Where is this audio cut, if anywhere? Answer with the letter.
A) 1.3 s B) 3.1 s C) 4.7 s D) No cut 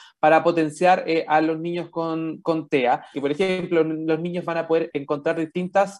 B